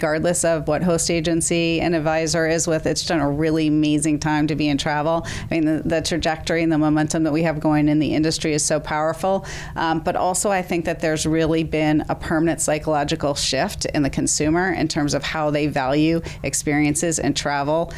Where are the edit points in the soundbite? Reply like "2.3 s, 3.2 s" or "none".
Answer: 3.0 s